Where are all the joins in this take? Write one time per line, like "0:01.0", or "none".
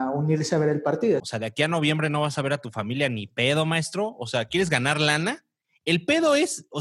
0:01.2